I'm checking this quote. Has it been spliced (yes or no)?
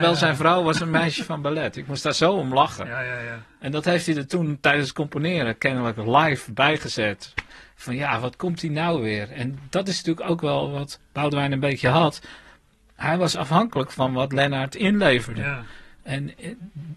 no